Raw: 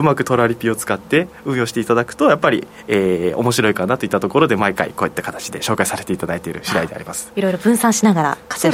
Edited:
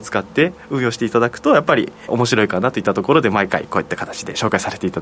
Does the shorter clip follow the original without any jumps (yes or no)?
no